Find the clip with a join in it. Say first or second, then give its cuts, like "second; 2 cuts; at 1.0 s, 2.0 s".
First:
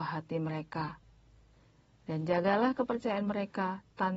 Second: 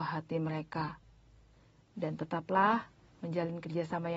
second; 1 cut; at 1.8 s